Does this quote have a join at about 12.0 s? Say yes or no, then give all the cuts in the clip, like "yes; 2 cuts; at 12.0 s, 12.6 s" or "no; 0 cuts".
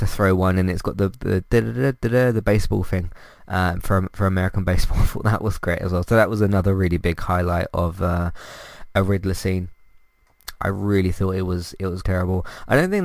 yes; 2 cuts; at 10.6 s, 12.0 s